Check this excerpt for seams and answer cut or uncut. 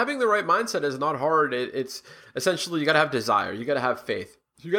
uncut